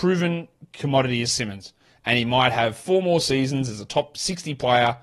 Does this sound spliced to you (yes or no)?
no